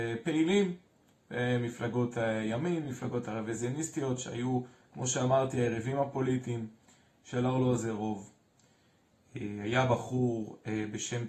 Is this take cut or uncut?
uncut